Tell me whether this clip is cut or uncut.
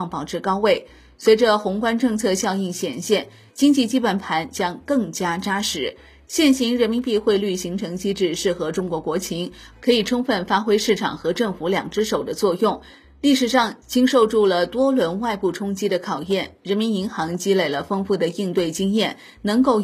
uncut